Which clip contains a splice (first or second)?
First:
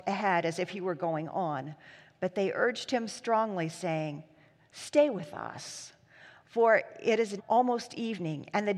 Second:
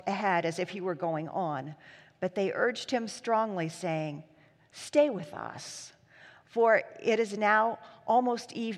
first